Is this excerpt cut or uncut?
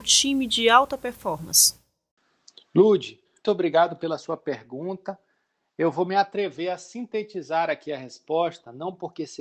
cut